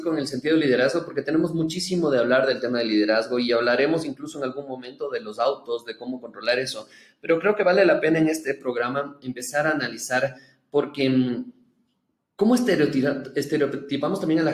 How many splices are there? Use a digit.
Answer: 0